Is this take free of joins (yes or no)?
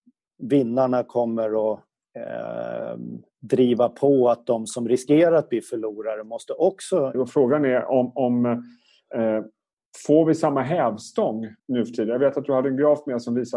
no